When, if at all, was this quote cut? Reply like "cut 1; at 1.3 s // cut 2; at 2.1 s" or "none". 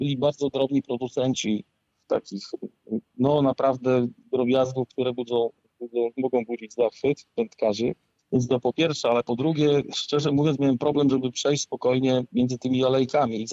none